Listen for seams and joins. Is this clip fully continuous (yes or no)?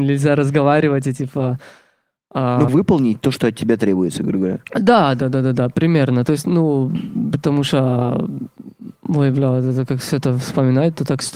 no